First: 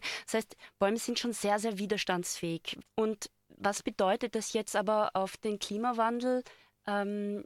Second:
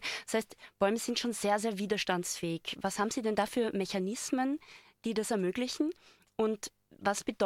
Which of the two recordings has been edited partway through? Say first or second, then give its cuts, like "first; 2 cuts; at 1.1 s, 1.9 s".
first; 1 cut; at 2.8 s